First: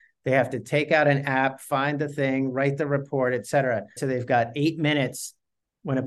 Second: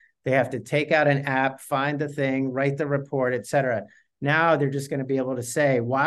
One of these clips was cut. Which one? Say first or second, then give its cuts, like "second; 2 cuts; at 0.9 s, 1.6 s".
first; 1 cut; at 4.0 s